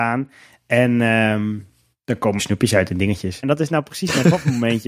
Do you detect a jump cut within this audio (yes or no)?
yes